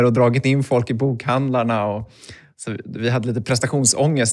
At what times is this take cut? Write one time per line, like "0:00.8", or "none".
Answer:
none

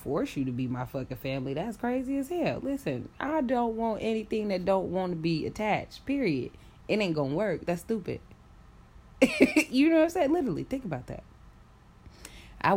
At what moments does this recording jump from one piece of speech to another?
none

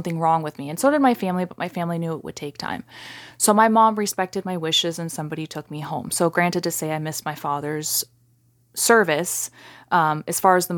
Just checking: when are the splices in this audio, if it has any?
none

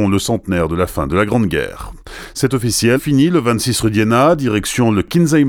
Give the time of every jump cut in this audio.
0:03.0

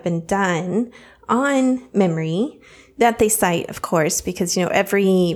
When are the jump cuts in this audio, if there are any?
none

